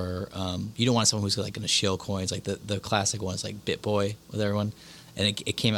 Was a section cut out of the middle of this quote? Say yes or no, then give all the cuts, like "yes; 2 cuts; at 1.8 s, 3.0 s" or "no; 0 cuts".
no; 0 cuts